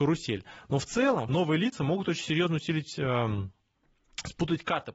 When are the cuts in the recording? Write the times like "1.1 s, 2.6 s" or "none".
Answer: 1.3 s